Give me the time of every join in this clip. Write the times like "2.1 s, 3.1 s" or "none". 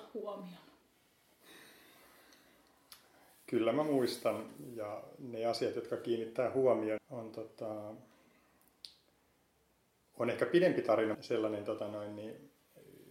7.0 s, 11.1 s